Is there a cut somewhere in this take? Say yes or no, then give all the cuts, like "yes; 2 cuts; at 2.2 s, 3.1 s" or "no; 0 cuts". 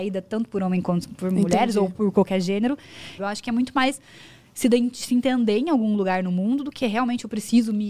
yes; 1 cut; at 3.2 s